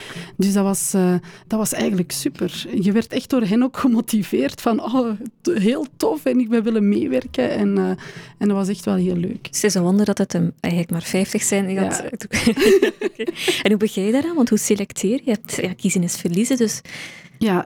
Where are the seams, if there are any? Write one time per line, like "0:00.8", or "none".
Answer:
none